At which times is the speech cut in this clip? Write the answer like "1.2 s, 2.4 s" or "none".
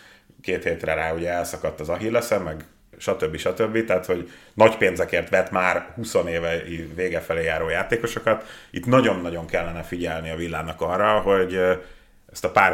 none